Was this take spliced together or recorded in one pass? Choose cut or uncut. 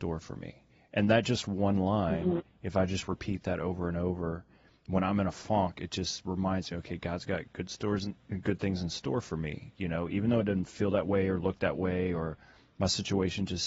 uncut